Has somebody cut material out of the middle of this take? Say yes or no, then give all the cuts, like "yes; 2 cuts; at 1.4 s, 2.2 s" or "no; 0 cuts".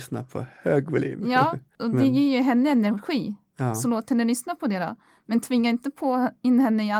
no; 0 cuts